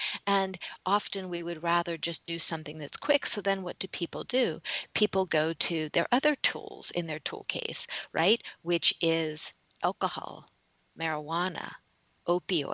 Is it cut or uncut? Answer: uncut